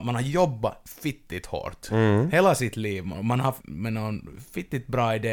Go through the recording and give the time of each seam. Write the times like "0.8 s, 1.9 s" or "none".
3.6 s